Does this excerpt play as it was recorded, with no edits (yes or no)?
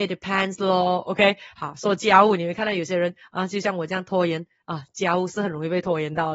yes